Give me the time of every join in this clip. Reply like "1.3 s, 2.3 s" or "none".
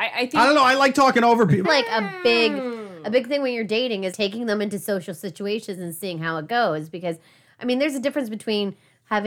1.6 s, 4.1 s